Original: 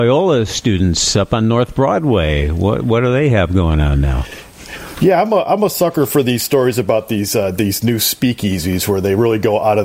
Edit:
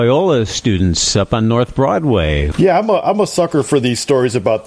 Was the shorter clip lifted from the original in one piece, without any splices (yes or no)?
no